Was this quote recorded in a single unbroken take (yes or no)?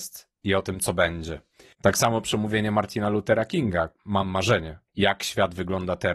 no